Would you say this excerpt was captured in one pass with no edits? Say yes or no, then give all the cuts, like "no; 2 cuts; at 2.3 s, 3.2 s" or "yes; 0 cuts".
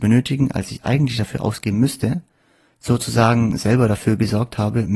no; 1 cut; at 2.7 s